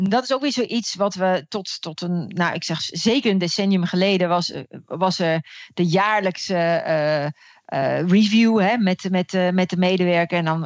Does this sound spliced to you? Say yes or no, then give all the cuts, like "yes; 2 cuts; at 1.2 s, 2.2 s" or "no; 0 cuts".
no; 0 cuts